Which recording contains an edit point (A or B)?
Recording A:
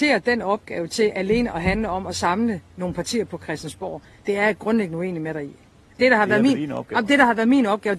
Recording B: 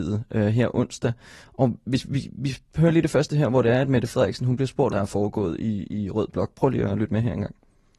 B